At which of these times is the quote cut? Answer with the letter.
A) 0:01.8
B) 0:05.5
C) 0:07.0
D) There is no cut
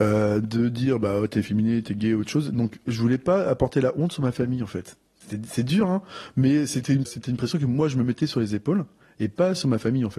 C